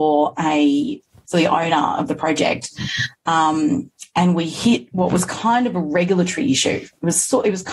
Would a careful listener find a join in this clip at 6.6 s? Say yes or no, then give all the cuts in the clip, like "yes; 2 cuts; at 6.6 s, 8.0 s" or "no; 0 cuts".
no; 1 cut; at 1.2 s